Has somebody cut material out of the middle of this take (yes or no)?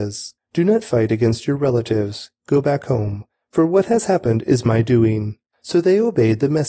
no